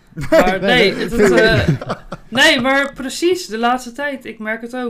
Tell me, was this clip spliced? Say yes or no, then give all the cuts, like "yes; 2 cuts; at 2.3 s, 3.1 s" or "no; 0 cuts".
no; 0 cuts